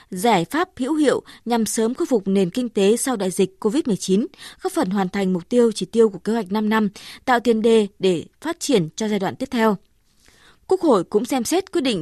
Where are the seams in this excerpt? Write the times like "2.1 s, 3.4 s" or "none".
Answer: none